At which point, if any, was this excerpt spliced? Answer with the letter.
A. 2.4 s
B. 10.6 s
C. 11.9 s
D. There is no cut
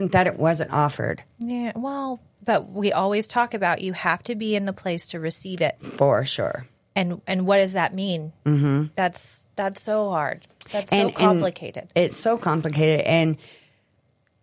A